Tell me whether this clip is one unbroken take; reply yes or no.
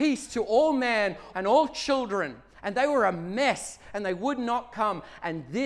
no